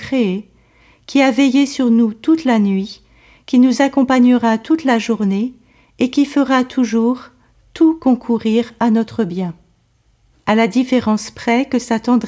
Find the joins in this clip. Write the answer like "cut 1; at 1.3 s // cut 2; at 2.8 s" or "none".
cut 1; at 10.3 s